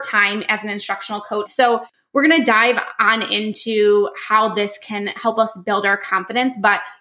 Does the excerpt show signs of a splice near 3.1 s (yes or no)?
no